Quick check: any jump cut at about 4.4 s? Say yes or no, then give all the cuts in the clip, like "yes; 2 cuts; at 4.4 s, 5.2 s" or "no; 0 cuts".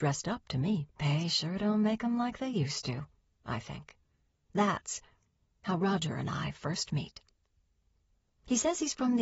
yes; 2 cuts; at 0.9 s, 4.4 s